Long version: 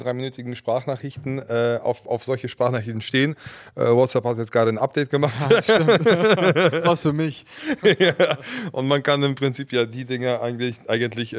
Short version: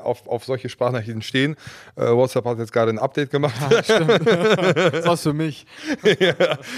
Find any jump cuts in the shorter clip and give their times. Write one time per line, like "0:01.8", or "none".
none